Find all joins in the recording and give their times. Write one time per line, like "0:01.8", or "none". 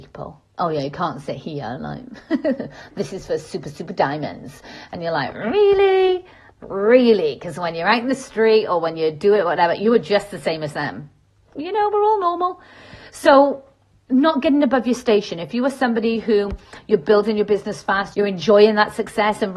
0:11.5
0:18.1